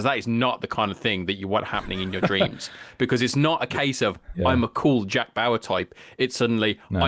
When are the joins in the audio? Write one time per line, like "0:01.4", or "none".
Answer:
0:04.3